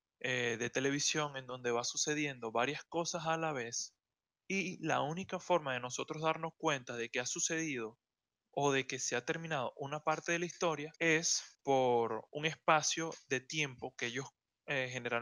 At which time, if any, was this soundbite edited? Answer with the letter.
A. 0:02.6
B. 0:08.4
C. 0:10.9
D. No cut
C